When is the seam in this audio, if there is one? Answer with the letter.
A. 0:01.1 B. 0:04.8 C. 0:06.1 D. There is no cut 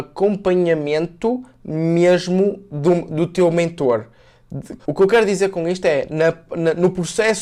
B